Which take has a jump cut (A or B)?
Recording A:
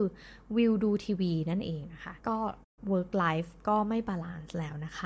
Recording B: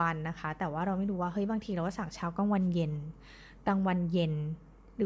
A